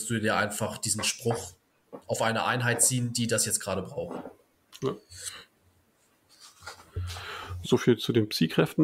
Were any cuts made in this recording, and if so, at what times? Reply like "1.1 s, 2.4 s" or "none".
4.8 s, 7.6 s